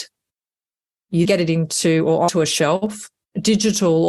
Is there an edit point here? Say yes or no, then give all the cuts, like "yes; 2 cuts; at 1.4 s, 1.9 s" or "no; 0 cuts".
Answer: yes; 1 cut; at 1.2 s